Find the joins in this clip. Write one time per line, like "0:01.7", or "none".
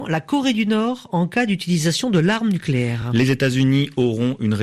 none

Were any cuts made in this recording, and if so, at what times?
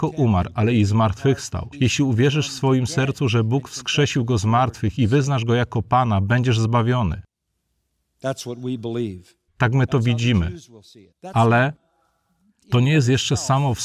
0:01.7
0:09.5
0:11.1

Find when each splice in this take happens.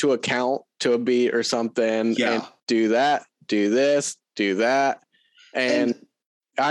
0:02.6

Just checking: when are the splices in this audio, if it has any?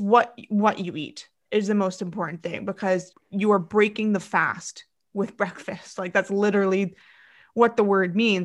0:03.1

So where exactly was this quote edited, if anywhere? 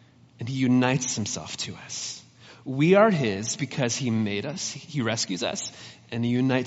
none

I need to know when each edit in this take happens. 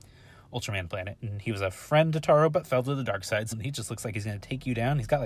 0:03.5

